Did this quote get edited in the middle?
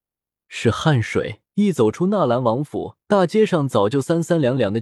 yes; 2 cuts; at 1.4 s, 3.0 s

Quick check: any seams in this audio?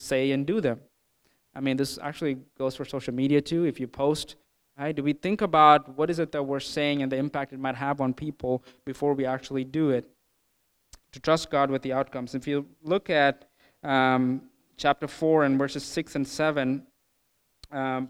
yes; 1 cut; at 11.0 s

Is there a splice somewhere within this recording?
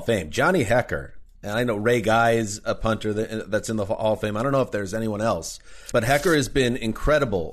yes; 1 cut; at 5.9 s

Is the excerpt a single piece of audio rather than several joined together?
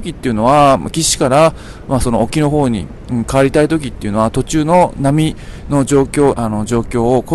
no; 1 cut; at 6.3 s

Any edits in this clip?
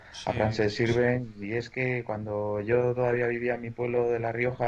yes; 1 cut; at 1.4 s

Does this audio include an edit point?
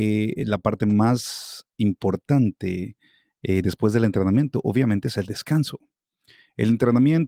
no; 0 cuts

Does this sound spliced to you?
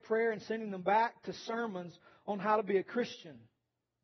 no; 0 cuts

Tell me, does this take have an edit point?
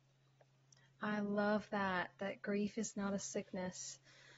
no; 0 cuts

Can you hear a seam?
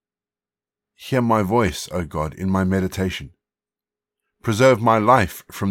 no; 0 cuts

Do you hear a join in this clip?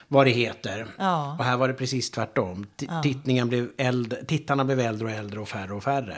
yes; 1 cut; at 1.0 s

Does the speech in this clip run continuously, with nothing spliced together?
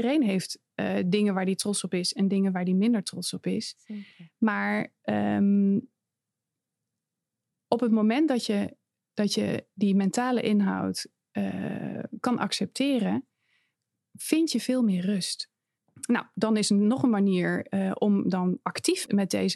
yes; 0 cuts

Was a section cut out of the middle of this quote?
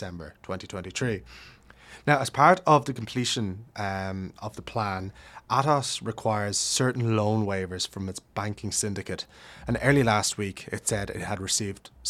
no; 0 cuts

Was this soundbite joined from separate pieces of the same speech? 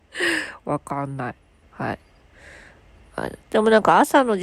yes; 2 cuts; at 1.6 s, 3.4 s

